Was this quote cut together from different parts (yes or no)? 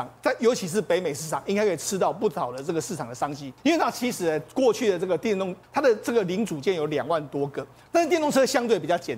yes